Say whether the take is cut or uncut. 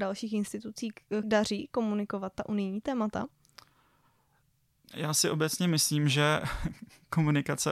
cut